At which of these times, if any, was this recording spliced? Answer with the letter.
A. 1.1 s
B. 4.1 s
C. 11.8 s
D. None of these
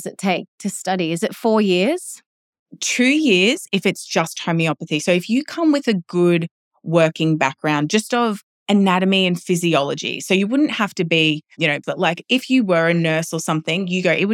C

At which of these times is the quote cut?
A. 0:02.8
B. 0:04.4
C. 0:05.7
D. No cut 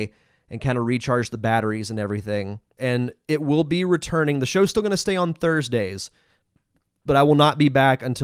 A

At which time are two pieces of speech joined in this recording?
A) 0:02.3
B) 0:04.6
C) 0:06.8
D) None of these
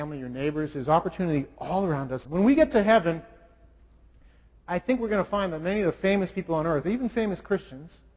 A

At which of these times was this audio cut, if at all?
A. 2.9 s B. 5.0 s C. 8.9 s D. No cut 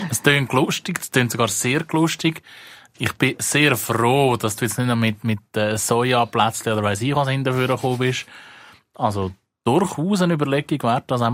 D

